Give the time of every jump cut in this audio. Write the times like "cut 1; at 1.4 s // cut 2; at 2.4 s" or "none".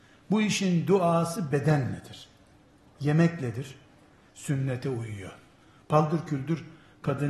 cut 1; at 4.3 s